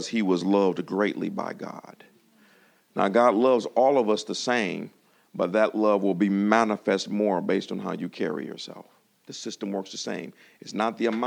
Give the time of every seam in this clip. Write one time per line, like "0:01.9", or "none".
0:09.2